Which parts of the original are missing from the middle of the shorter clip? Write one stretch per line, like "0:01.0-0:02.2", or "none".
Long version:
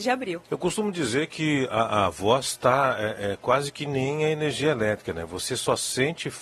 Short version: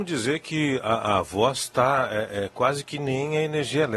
none